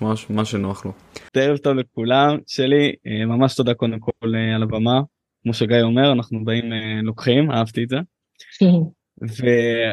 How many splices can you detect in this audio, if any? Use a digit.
1